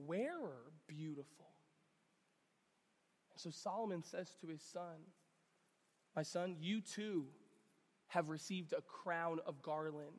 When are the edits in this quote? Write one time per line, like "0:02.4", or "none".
none